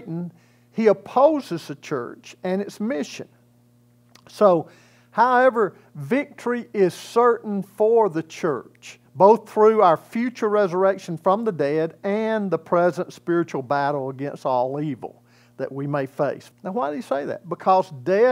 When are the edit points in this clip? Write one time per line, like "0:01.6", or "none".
0:09.1
0:16.5

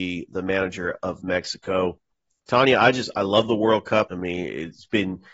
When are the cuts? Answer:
0:04.1

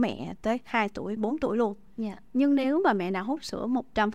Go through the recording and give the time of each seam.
0:01.2

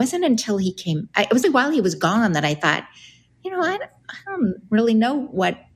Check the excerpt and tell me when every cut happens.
0:01.4

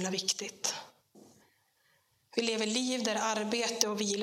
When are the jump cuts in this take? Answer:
none

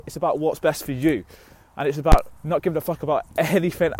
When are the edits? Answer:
none

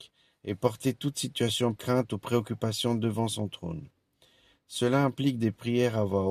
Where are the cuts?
0:01.8

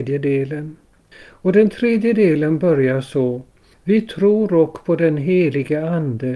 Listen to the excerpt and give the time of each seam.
none

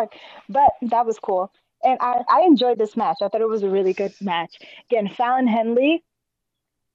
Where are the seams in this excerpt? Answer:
0:02.3

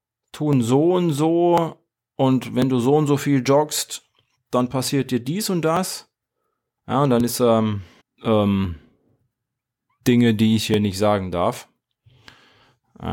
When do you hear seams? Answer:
0:06.8
0:08.0

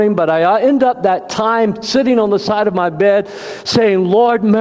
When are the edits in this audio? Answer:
none

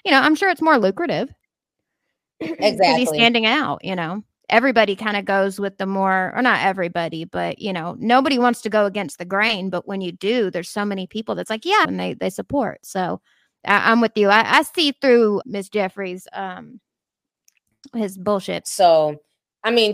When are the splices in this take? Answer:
0:11.8
0:15.4
0:18.6

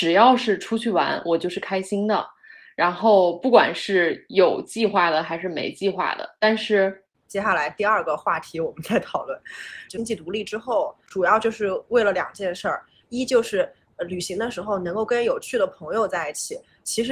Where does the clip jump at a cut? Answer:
0:07.1
0:09.9

